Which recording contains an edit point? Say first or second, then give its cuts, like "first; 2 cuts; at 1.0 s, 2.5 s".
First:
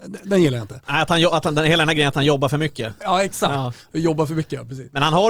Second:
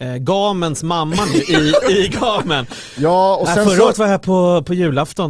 second; 1 cut; at 1.8 s